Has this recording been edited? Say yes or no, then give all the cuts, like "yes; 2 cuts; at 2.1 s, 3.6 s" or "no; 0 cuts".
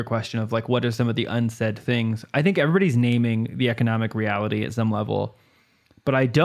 no; 0 cuts